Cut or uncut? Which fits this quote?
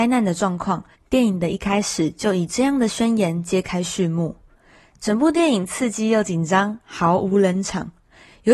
cut